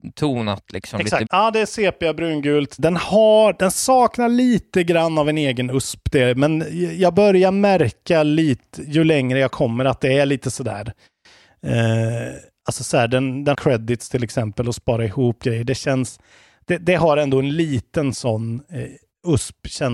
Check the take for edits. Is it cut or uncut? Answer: cut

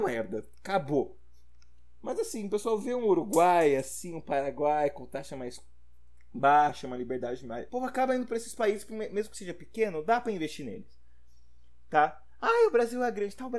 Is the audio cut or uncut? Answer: cut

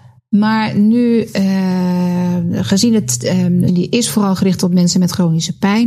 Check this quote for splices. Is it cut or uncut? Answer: cut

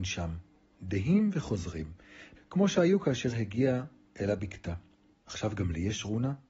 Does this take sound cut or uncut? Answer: cut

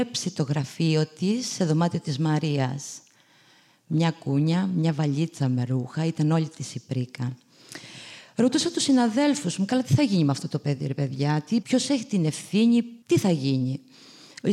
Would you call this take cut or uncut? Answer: cut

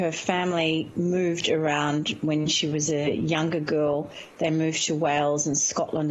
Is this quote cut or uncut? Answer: uncut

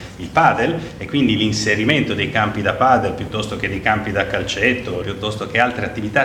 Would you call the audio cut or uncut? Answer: cut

